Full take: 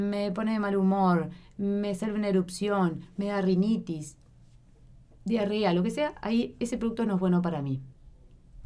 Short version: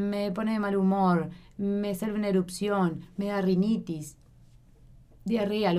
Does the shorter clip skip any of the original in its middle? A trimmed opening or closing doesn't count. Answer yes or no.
no